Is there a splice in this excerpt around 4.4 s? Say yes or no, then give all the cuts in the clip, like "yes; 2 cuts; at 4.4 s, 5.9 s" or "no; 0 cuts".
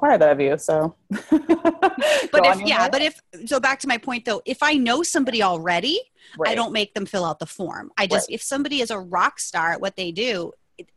no; 2 cuts; at 1.0 s, 8.3 s